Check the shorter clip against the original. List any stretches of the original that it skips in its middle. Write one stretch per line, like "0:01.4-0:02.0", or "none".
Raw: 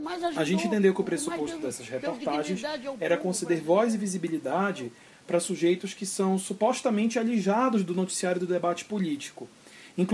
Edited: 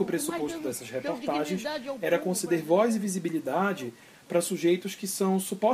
none